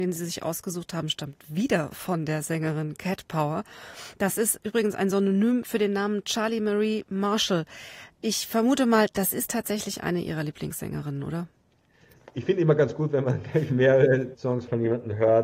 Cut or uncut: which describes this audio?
uncut